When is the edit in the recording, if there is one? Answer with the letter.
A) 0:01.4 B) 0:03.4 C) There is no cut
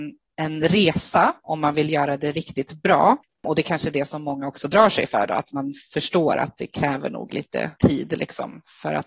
C